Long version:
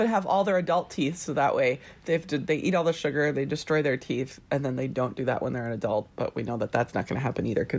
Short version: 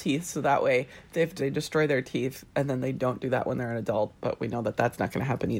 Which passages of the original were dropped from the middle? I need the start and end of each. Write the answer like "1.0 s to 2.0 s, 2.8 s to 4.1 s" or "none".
2.3 s to 3.3 s